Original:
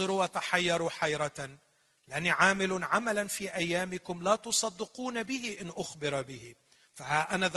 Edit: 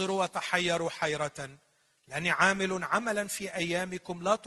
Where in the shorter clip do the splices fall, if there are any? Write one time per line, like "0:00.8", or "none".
none